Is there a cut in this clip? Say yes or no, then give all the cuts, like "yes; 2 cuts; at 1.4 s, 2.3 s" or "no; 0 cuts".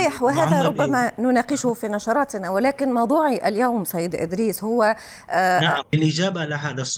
yes; 1 cut; at 5.8 s